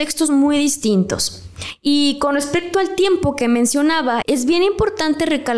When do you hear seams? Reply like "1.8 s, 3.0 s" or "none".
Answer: 4.2 s